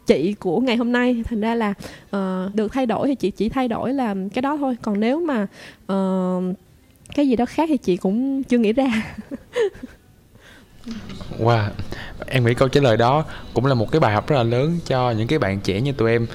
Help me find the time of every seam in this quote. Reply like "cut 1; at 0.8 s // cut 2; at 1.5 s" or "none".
cut 1; at 2.5 s // cut 2; at 12.2 s

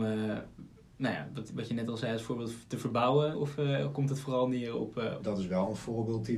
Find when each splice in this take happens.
cut 1; at 3.3 s // cut 2; at 5.2 s

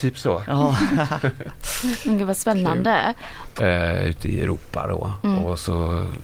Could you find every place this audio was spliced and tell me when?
cut 1; at 3.6 s

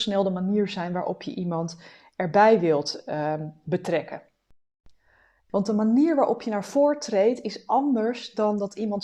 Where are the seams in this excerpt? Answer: cut 1; at 5.5 s

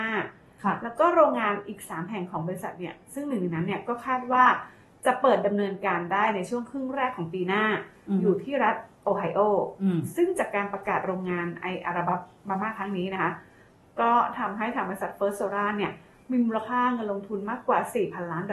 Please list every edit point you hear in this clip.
none

